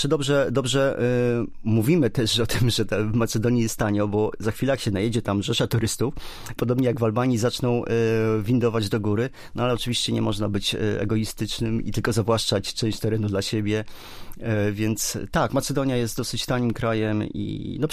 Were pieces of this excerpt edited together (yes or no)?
yes